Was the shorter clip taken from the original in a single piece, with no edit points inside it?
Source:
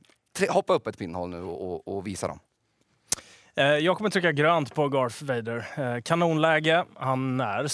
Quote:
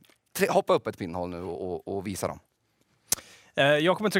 yes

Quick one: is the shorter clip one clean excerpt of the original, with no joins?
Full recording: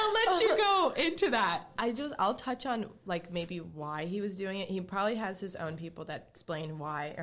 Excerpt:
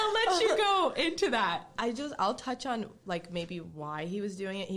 yes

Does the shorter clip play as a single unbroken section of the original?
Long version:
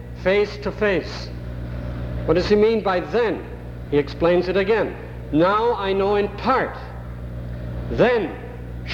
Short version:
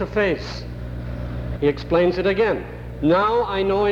no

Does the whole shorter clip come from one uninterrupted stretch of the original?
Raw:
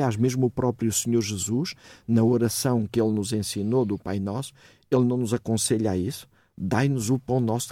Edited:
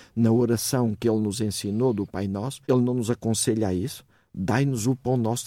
no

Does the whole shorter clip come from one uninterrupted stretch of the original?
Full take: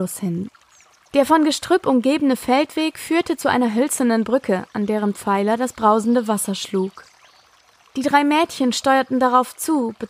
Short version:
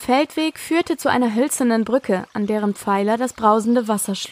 yes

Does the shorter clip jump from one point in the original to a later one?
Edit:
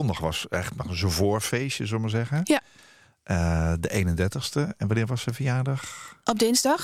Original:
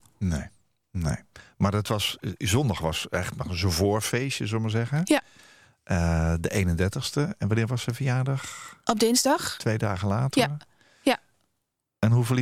no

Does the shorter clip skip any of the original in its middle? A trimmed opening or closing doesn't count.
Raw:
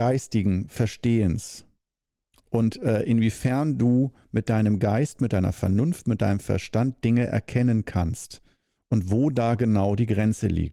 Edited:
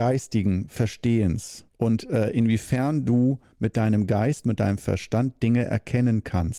yes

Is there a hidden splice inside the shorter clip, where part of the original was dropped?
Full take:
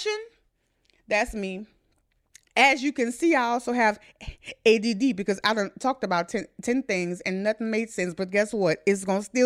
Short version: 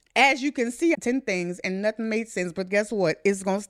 yes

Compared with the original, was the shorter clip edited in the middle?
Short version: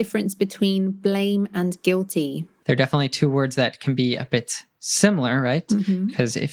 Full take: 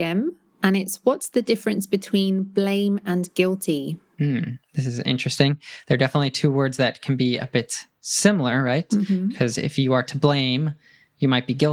yes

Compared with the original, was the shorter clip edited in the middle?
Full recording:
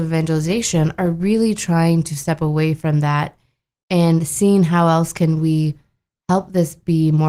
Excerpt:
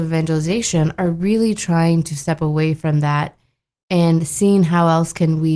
no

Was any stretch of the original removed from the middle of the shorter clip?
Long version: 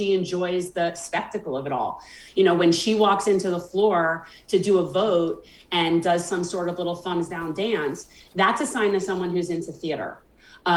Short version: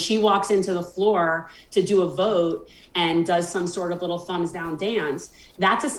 no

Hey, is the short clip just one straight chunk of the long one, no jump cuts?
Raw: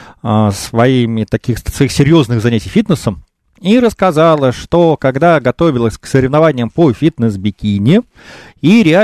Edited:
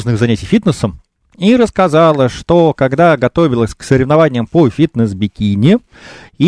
yes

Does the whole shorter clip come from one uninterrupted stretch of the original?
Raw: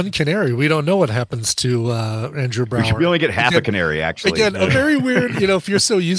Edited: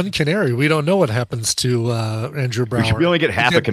yes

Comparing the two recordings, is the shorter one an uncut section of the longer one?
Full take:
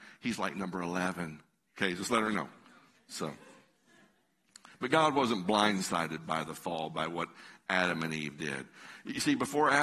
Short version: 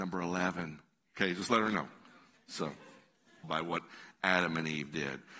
no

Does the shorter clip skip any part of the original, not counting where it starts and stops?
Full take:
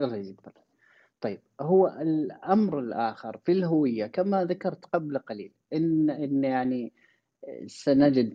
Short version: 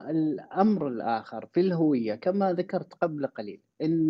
no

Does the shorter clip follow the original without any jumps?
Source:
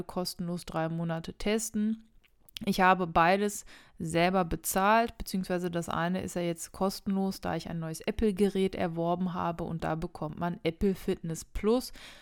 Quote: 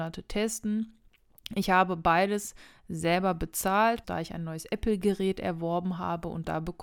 no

